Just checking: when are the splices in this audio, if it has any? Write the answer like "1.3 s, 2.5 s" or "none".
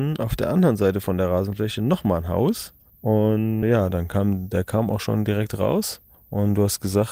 3.6 s